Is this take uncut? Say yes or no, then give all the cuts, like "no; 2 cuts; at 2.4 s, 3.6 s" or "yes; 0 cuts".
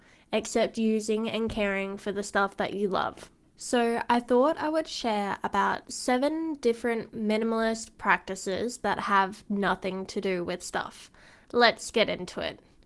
yes; 0 cuts